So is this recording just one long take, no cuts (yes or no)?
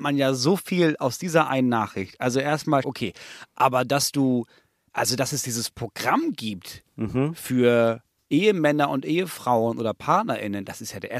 no